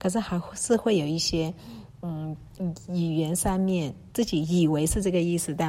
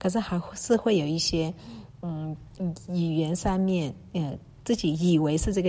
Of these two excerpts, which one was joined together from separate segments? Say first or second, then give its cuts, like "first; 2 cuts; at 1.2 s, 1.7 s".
first; 1 cut; at 4.1 s